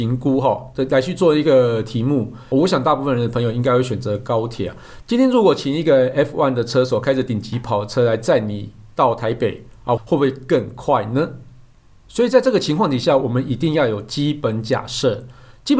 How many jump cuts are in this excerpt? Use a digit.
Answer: 3